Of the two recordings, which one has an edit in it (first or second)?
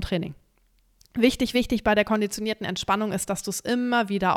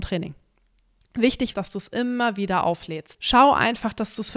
second